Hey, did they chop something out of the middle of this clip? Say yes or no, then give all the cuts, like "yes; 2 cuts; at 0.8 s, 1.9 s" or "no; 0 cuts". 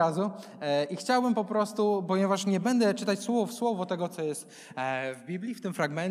no; 0 cuts